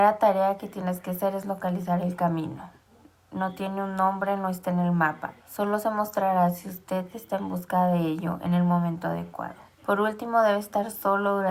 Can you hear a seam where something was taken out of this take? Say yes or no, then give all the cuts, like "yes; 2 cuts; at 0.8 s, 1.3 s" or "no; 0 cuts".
yes; 2 cuts; at 5.4 s, 9.8 s